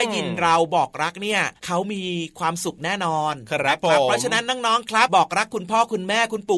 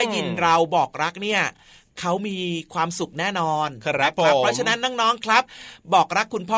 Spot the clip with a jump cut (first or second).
first